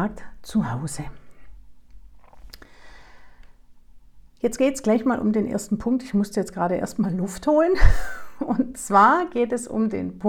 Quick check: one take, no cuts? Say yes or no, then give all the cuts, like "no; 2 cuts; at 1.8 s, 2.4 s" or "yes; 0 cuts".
yes; 0 cuts